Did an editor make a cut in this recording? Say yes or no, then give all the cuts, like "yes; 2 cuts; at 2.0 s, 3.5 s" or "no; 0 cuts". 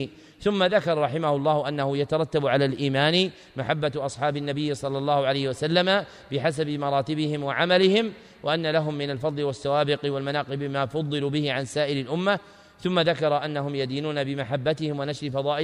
no; 0 cuts